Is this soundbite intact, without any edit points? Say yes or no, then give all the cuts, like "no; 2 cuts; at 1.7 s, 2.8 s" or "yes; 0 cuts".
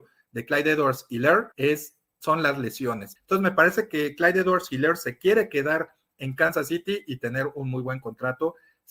no; 2 cuts; at 1.5 s, 3.2 s